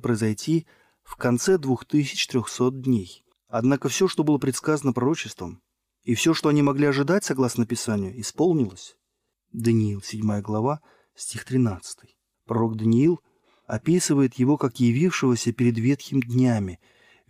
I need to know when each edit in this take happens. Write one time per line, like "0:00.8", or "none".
0:03.3
0:09.3
0:12.3

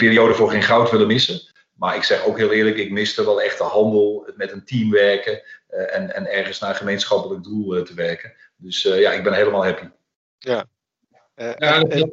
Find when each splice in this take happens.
none

